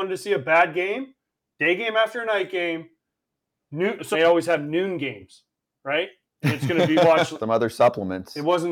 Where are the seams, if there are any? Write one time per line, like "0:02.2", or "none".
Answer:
0:04.1
0:06.2
0:07.4